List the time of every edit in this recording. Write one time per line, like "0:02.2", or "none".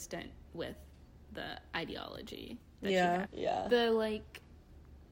0:03.3